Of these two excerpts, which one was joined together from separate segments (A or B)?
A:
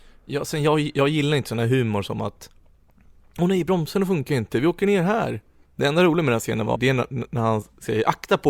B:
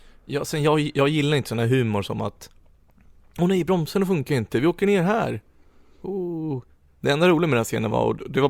A